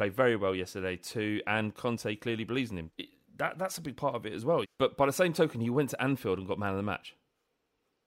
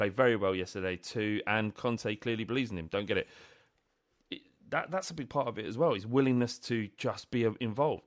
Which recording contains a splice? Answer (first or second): first